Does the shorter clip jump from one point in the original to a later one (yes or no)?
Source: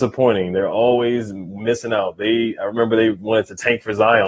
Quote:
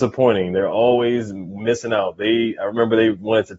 no